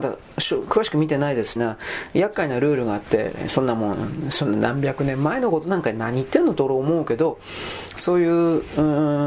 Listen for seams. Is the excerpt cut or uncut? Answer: cut